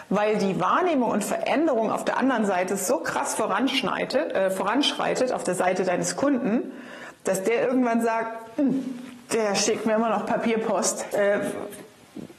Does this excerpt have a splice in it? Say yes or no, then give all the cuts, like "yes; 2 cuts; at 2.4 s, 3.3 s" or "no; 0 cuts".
yes; 1 cut; at 11.1 s